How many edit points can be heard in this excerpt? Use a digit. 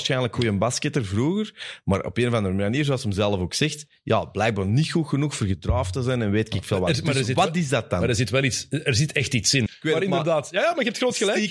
1